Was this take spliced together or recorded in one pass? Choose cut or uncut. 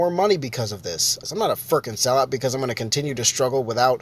cut